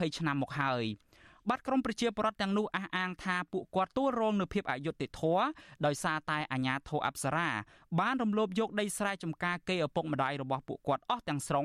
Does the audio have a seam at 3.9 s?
yes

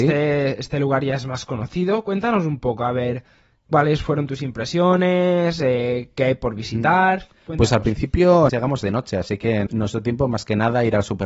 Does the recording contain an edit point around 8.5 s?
yes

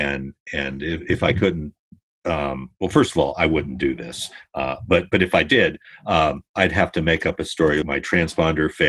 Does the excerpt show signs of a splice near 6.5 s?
yes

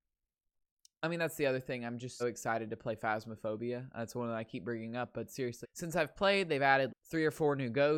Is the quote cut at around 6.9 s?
yes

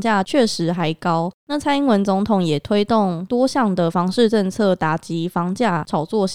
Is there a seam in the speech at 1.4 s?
yes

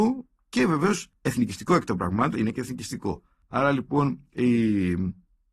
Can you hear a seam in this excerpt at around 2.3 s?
yes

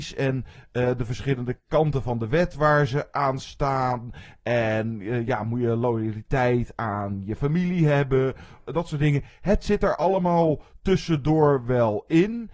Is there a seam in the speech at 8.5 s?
no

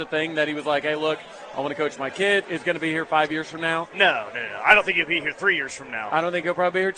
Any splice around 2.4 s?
yes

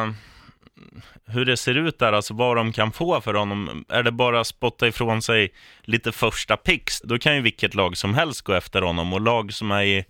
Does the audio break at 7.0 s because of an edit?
yes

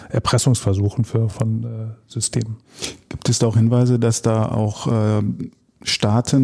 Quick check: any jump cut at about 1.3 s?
no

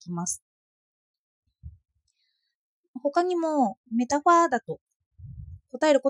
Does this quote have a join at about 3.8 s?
yes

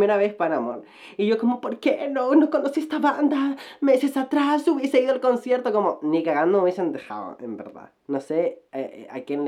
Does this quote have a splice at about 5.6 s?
no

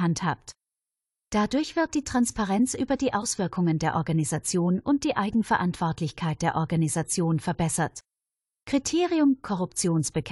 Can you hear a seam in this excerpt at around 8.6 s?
yes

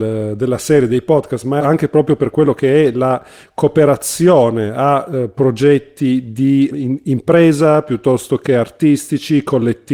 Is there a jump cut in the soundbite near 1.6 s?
yes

